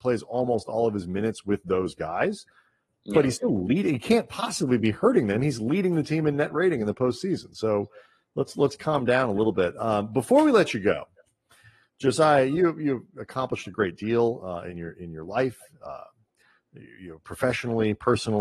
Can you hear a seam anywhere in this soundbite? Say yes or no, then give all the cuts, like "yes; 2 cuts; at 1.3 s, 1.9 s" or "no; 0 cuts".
no; 0 cuts